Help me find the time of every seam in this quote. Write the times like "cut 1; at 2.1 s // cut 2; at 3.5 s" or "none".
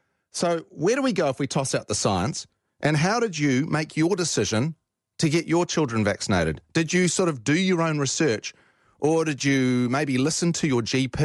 none